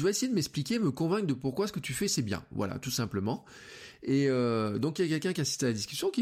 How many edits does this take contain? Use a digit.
0